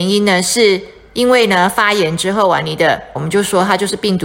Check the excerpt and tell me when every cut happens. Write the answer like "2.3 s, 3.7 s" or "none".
3.2 s